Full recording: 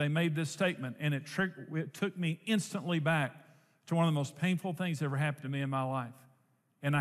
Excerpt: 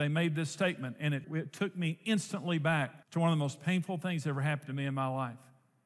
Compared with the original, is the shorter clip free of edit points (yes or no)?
no